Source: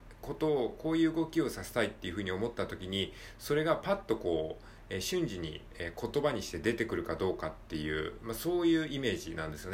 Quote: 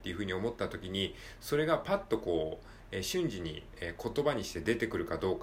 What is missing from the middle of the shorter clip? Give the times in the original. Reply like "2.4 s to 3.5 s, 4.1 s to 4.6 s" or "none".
none